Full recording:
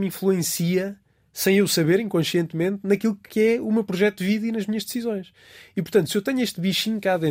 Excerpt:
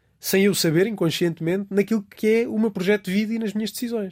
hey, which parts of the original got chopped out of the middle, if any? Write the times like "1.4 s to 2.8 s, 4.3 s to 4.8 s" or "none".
none